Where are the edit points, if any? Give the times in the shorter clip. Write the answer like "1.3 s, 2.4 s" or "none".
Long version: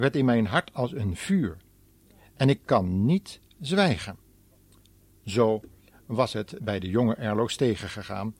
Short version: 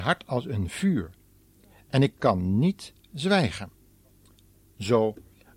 none